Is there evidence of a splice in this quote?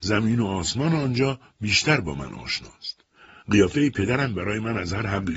yes; 1 cut; at 3.4 s

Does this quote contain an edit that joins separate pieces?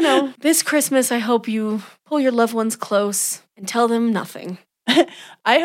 no; 0 cuts

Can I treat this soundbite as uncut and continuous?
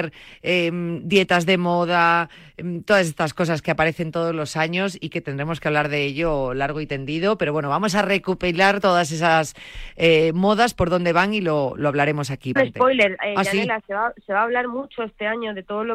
no; 1 cut; at 12.6 s

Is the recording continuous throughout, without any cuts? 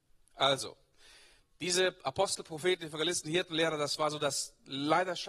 yes; 0 cuts

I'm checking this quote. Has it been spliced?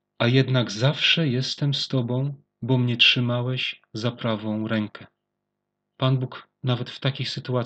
no; 0 cuts

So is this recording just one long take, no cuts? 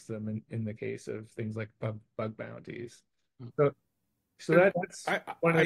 no; 2 cuts; at 3.5 s, 4.7 s

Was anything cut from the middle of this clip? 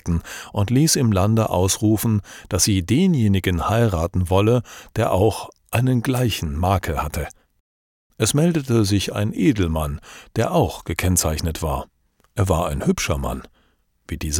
no; 0 cuts

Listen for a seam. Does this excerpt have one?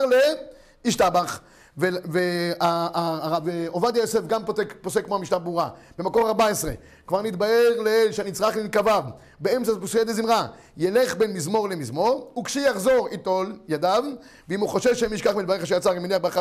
no; 0 cuts

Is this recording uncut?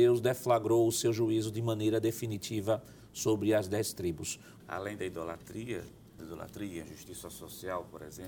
no; 2 cuts; at 4.6 s, 6.2 s

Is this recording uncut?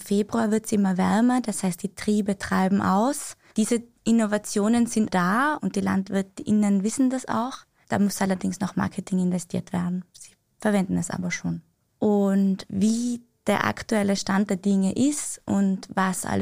no; 1 cut; at 3.5 s

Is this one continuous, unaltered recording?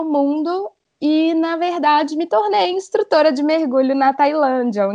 yes; 0 cuts

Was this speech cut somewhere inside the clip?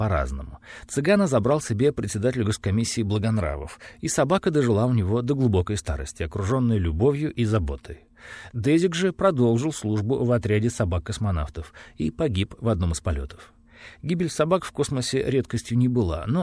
no; 0 cuts

